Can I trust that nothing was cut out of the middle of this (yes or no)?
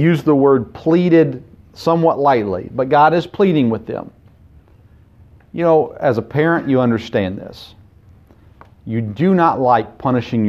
yes